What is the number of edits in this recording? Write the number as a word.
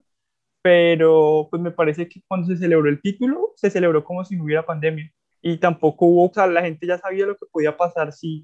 two